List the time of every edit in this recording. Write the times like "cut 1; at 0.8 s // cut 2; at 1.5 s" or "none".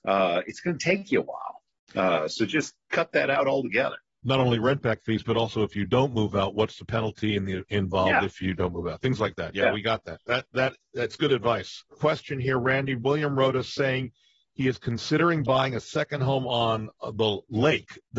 none

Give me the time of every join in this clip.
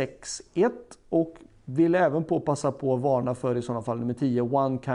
none

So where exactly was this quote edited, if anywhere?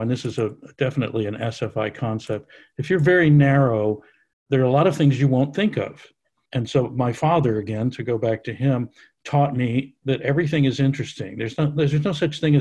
none

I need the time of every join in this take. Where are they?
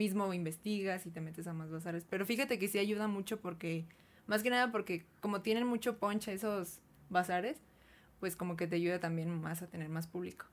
none

